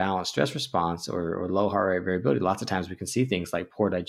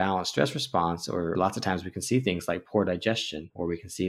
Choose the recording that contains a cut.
second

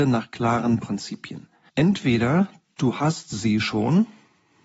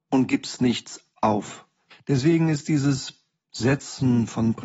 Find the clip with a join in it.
second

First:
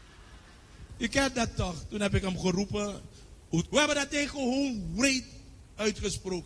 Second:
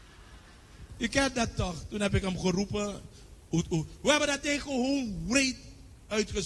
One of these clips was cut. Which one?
first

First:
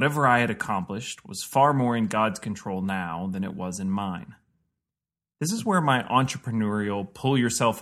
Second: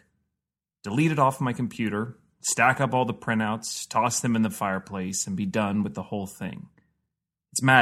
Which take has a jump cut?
first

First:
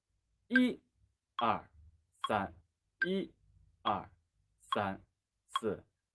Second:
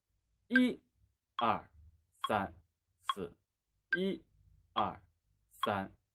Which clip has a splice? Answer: first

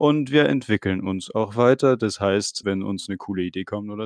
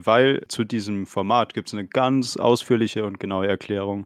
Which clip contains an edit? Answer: first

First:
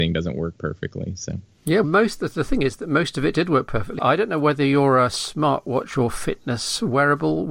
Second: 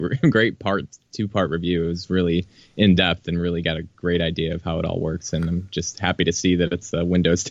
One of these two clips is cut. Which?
first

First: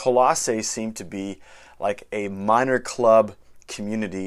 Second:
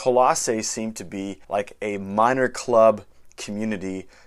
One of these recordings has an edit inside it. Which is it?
second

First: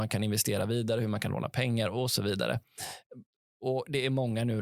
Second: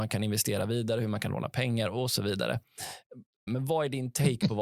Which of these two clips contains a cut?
second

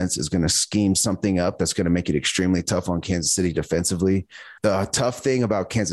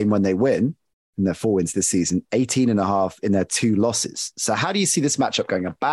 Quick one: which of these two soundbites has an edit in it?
first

